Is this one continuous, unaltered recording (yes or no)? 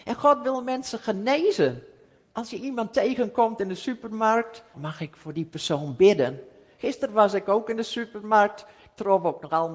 no